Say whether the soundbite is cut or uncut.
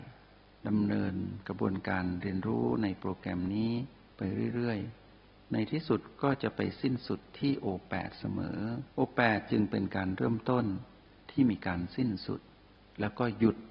cut